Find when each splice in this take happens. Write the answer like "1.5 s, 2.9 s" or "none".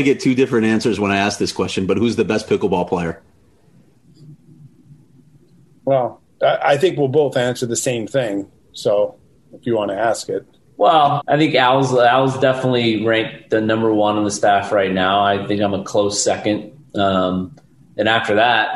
11.2 s